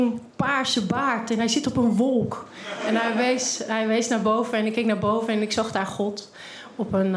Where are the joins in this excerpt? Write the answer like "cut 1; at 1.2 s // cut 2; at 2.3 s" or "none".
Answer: none